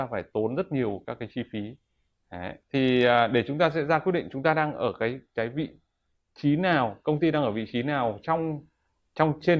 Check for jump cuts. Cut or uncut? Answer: cut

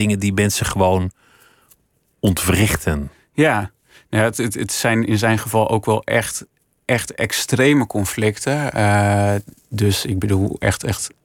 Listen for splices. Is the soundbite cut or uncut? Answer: uncut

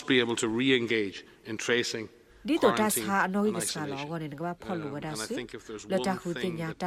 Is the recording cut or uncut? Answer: uncut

